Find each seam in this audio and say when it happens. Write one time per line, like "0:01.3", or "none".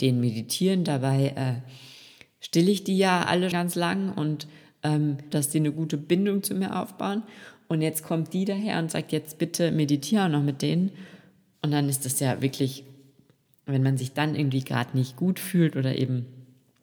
0:03.5
0:05.3